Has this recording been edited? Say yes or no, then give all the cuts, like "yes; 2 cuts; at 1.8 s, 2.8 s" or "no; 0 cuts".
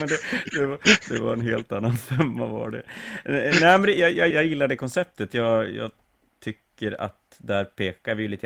yes; 1 cut; at 4.3 s